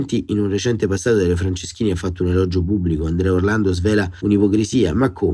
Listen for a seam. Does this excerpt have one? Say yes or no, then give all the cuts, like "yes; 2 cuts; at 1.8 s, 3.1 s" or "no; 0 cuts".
no; 0 cuts